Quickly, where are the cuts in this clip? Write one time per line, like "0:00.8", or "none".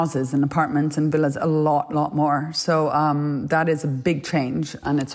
none